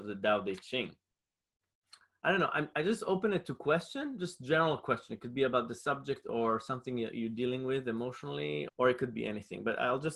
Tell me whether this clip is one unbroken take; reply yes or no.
no